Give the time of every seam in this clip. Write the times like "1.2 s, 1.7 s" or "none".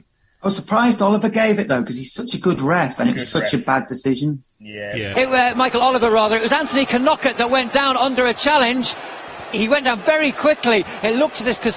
5.1 s, 9.5 s